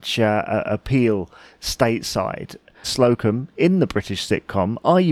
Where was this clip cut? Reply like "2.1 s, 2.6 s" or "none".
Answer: 2.8 s